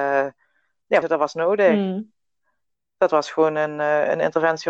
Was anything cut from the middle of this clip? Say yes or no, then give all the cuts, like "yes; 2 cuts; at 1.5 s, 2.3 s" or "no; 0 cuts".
yes; 1 cut; at 1.0 s